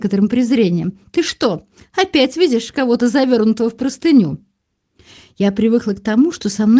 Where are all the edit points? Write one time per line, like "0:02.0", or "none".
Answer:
none

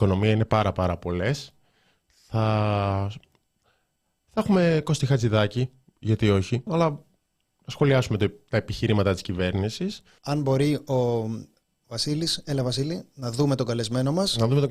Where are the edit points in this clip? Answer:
0:06.7
0:10.2

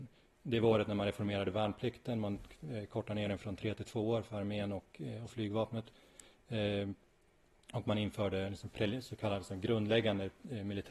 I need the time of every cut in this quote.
none

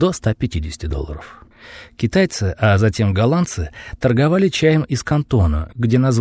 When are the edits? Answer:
none

